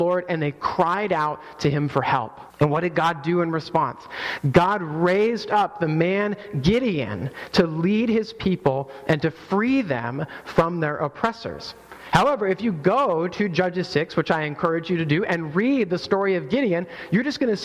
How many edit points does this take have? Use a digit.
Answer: 1